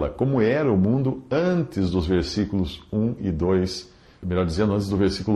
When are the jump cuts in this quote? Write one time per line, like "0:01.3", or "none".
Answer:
0:04.2